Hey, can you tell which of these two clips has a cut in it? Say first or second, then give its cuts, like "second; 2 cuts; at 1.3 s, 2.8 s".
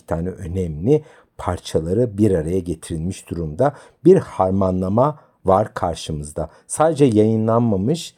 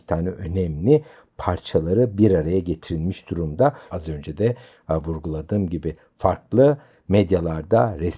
second; 1 cut; at 3.9 s